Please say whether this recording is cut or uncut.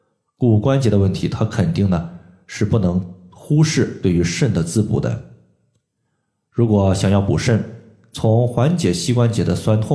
uncut